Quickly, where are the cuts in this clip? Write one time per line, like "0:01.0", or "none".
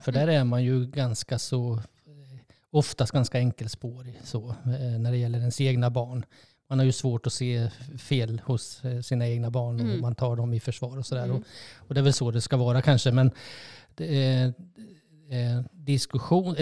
none